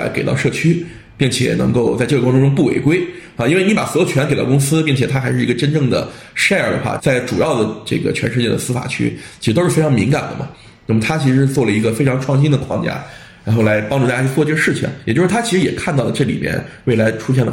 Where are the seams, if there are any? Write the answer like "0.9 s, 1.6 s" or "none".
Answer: 7.0 s